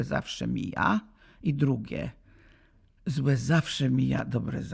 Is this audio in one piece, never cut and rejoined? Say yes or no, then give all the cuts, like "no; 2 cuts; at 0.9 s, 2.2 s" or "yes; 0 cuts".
yes; 0 cuts